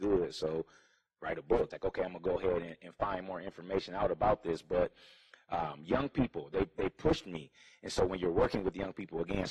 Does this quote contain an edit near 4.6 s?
no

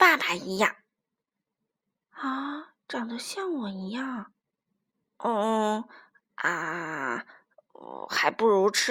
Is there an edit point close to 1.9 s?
no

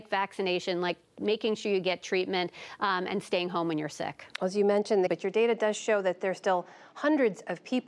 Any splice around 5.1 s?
yes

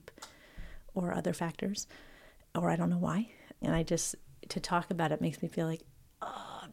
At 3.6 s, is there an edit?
yes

